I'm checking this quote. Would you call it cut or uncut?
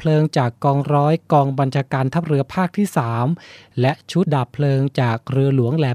cut